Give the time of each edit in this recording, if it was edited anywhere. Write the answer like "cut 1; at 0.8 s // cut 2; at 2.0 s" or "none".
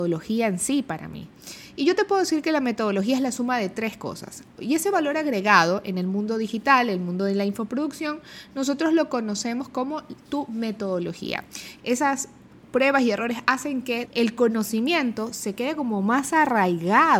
cut 1; at 4.6 s // cut 2; at 11.8 s // cut 3; at 14.0 s